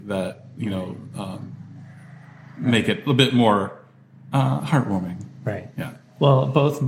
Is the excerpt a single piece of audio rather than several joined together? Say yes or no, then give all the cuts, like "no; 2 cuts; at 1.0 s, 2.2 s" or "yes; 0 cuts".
yes; 0 cuts